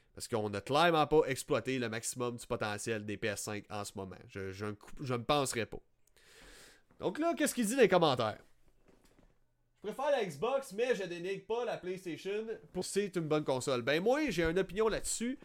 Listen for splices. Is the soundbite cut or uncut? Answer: cut